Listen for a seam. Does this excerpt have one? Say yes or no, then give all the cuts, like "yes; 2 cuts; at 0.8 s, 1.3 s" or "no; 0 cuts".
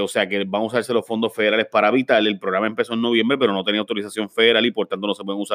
no; 0 cuts